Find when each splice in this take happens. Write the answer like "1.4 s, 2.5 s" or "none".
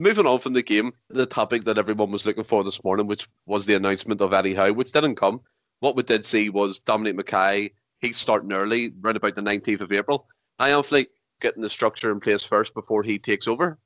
1.1 s, 11.4 s

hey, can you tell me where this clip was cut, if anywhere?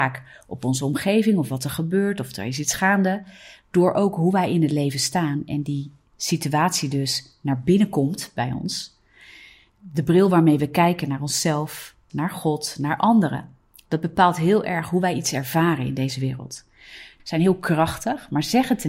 12.1 s, 17.2 s

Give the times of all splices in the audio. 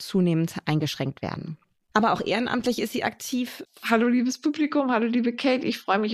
1.9 s, 3.6 s

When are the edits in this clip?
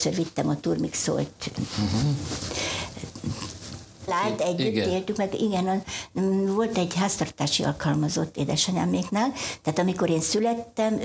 4.1 s

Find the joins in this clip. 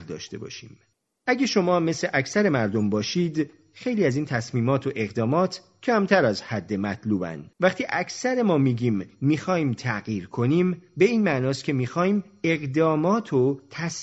1.1 s, 7.5 s

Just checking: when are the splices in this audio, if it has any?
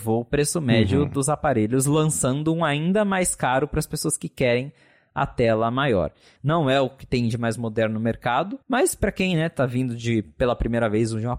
6.4 s, 8.6 s

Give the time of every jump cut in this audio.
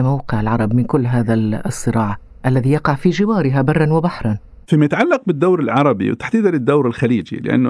none

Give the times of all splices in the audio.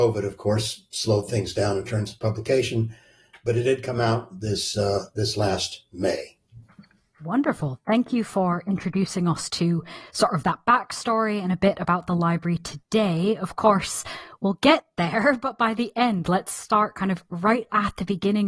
none

